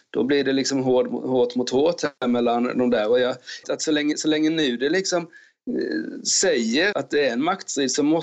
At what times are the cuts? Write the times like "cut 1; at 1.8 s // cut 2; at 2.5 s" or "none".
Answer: cut 1; at 3.6 s // cut 2; at 6.9 s